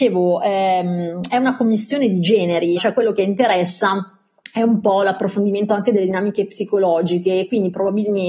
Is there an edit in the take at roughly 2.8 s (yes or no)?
yes